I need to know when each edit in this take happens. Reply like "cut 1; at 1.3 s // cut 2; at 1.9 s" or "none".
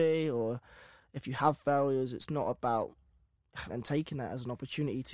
cut 1; at 3.7 s